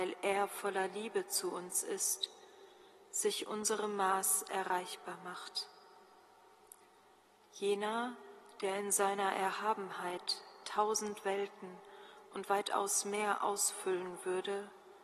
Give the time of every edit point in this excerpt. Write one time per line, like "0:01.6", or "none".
0:07.4